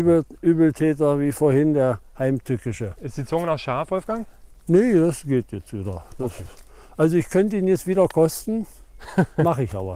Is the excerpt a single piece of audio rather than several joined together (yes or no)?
no